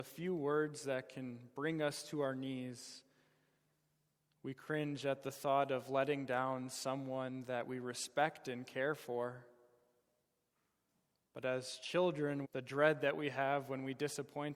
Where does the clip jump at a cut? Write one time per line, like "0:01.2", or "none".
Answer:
0:12.4